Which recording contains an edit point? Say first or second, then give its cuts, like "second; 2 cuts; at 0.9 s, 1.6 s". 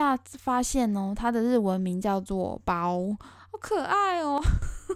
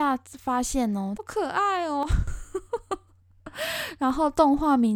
second; 1 cut; at 1.2 s